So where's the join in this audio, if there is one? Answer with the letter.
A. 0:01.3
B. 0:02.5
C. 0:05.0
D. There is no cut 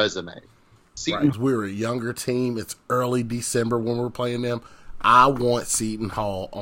A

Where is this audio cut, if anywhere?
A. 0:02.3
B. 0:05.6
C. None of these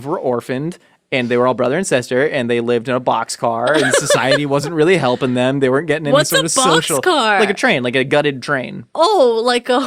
C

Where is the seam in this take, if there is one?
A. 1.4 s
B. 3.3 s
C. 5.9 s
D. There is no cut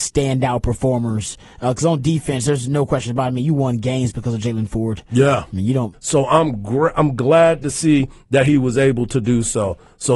C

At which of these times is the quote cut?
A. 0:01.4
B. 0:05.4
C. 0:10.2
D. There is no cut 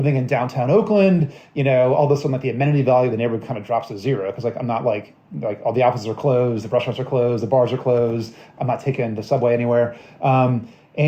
D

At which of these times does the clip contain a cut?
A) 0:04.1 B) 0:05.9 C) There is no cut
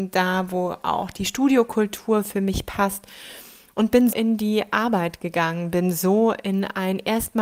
A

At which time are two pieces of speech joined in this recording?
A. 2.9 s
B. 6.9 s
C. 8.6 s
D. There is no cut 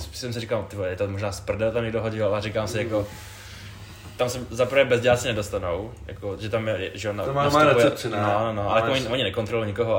D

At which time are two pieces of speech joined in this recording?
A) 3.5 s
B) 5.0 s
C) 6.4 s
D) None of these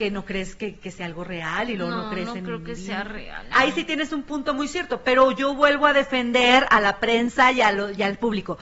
A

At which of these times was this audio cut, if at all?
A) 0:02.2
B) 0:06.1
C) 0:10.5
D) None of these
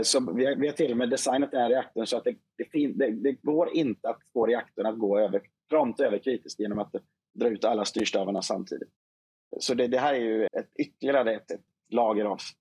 C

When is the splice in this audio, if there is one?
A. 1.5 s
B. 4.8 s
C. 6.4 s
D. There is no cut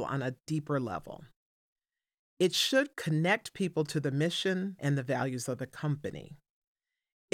B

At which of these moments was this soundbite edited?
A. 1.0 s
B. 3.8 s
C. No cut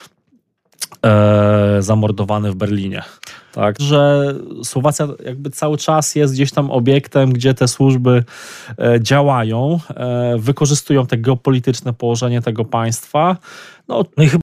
B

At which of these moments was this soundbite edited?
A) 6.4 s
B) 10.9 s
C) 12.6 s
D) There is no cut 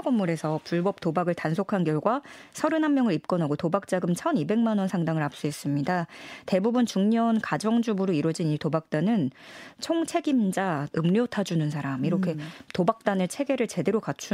B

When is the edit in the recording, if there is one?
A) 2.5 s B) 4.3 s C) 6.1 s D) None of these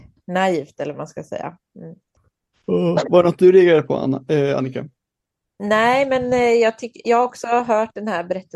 A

